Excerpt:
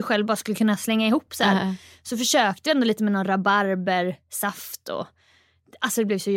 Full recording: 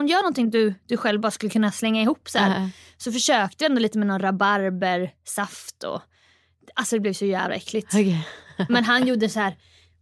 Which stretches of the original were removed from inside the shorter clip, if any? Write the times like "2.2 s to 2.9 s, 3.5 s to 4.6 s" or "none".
none